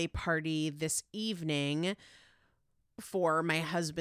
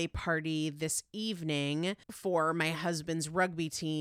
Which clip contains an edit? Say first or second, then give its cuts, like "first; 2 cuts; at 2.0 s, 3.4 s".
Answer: second; 1 cut; at 2.0 s